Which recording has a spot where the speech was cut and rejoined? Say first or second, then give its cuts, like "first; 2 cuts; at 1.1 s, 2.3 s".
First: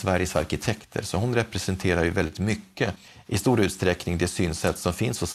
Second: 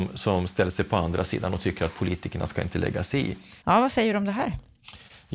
second; 1 cut; at 3.6 s